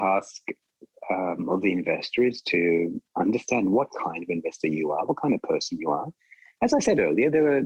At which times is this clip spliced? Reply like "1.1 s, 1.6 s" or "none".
none